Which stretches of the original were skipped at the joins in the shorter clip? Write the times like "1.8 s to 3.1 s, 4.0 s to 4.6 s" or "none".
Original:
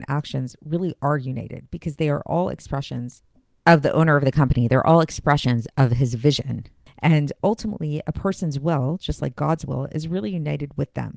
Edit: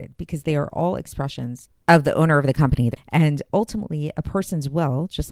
3.3 s to 3.6 s, 4.7 s to 6.8 s